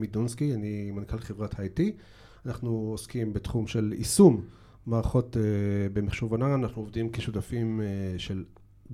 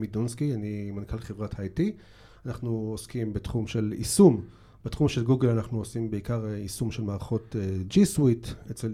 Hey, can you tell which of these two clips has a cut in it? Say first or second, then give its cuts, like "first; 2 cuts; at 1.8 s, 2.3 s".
second; 1 cut; at 4.8 s